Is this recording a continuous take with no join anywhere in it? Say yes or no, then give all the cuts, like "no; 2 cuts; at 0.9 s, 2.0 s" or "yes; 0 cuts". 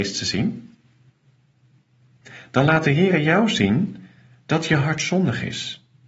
yes; 0 cuts